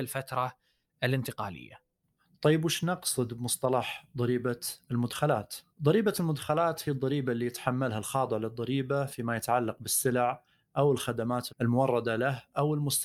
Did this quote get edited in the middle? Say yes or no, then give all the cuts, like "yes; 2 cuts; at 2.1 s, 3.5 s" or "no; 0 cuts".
yes; 2 cuts; at 5.7 s, 11.5 s